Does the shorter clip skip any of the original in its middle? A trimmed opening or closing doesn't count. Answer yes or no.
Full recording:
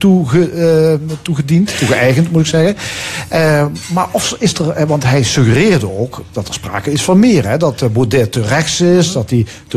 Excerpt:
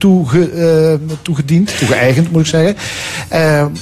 no